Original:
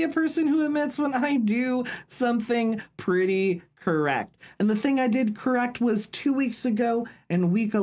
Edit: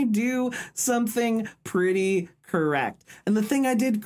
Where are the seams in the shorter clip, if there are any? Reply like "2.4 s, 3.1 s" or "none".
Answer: none